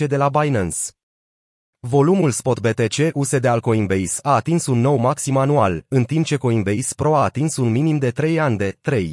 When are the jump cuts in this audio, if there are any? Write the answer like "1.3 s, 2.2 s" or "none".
none